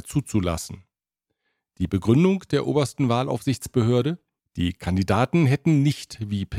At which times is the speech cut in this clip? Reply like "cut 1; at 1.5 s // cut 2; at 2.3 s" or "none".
none